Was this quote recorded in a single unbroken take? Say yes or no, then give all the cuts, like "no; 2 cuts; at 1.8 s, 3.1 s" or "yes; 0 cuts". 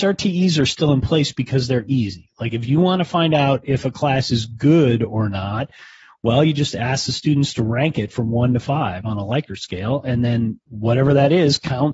yes; 0 cuts